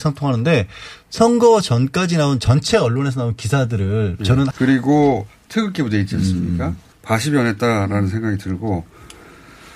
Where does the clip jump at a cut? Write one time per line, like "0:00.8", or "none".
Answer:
0:04.5
0:06.9